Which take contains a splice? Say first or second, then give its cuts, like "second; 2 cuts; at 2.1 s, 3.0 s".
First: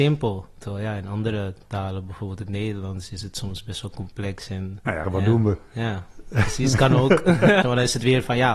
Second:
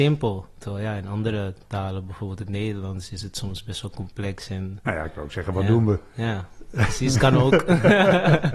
first; 2 cuts; at 5.0 s, 7.6 s